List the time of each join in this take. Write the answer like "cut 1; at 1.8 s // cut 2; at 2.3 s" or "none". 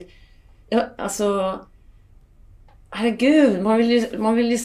none

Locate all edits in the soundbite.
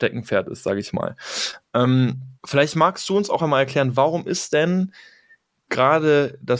cut 1; at 2.4 s // cut 2; at 3.4 s

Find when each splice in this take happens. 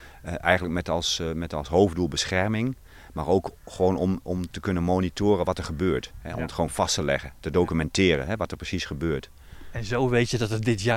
none

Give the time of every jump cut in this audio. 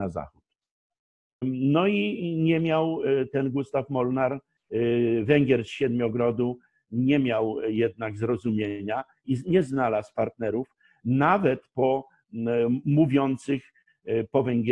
cut 1; at 1.4 s

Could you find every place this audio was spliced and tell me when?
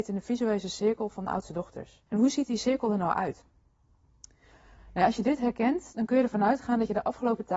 cut 1; at 2.1 s // cut 2; at 4.8 s

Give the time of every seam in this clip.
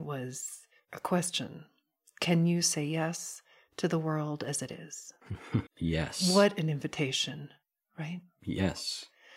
cut 1; at 5.7 s

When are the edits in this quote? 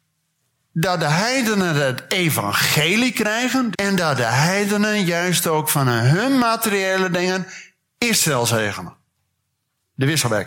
cut 1; at 3.7 s

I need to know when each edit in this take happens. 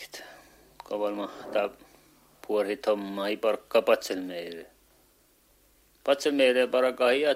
none

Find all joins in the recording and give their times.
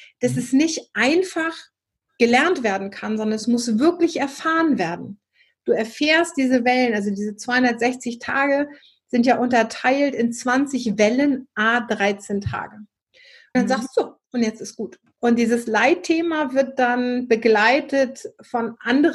cut 1; at 13.5 s // cut 2; at 15.1 s

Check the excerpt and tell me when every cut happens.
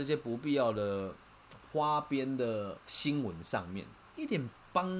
cut 1; at 2.8 s

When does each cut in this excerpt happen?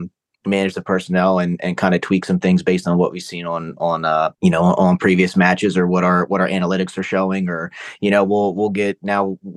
cut 1; at 4.4 s

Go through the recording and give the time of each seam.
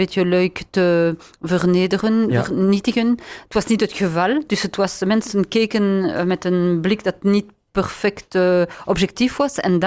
none

